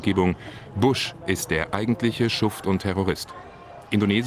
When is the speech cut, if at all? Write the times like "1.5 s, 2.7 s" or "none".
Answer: none